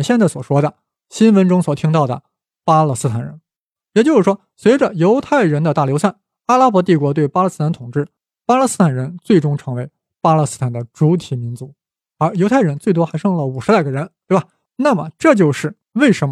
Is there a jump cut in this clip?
no; 0 cuts

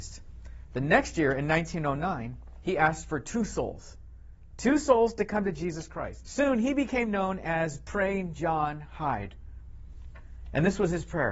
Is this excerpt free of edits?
no; 1 cut; at 6.2 s

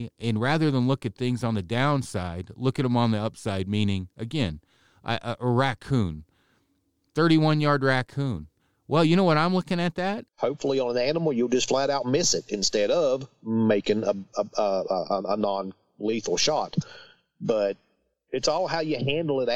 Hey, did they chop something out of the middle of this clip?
yes; 1 cut; at 10.3 s

